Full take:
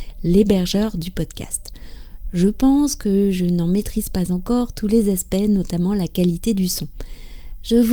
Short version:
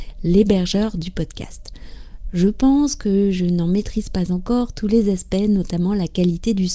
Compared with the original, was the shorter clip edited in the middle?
no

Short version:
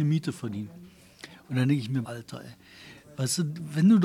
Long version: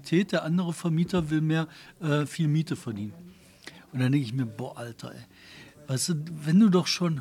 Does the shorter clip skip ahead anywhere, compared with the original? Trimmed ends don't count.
yes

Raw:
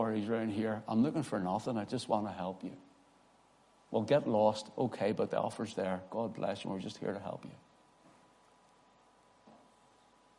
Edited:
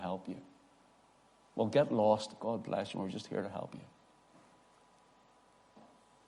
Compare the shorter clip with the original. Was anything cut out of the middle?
yes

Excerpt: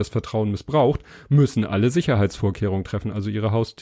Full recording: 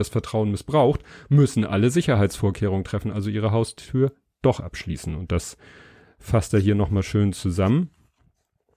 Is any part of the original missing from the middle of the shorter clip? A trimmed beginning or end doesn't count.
no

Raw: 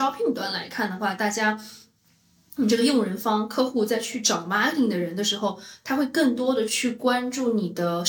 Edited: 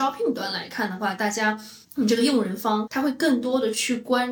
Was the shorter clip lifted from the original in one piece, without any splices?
no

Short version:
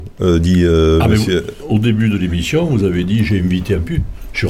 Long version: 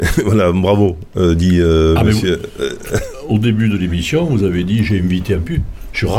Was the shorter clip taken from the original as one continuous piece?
no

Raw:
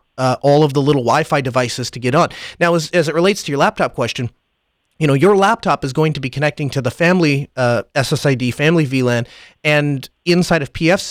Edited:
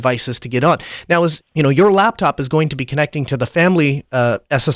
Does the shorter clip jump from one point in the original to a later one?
yes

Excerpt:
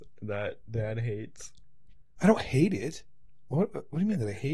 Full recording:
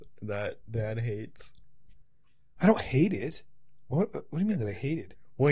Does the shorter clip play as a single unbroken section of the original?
no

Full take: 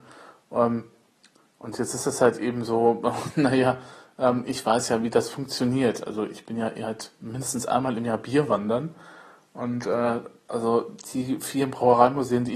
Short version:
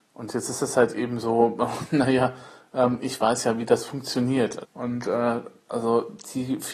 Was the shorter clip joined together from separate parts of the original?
yes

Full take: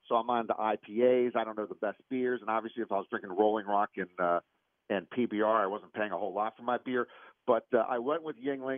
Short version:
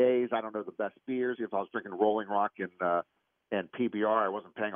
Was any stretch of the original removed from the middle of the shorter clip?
yes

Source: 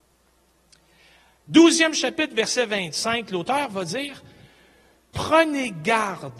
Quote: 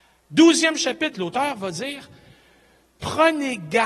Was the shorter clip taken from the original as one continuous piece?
no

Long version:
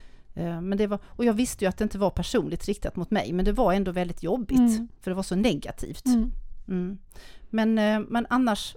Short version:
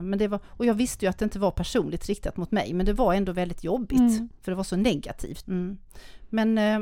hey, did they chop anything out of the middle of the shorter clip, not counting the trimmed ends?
yes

